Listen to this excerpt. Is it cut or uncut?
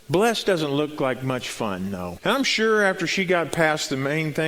cut